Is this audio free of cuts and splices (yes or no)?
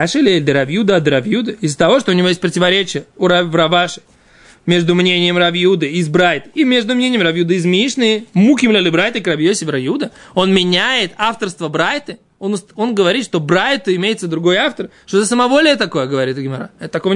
yes